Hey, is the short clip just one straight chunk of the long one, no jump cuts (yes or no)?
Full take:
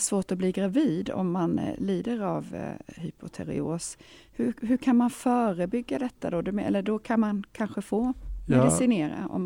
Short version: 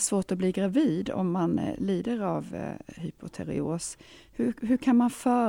yes